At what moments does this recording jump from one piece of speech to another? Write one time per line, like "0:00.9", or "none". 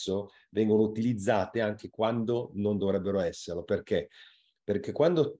none